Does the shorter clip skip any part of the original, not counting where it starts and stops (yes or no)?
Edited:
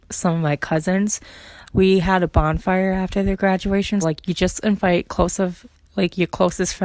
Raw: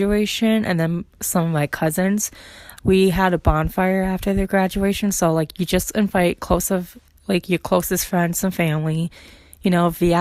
yes